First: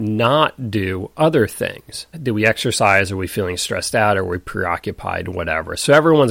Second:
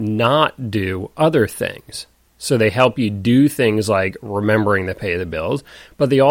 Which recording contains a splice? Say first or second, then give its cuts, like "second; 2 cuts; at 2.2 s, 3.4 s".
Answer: first; 1 cut; at 2.1 s